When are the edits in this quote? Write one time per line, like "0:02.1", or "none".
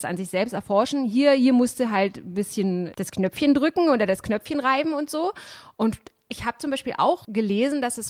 none